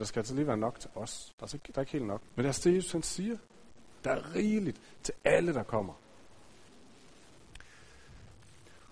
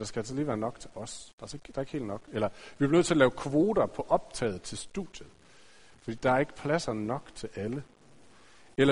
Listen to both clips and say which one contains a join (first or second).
first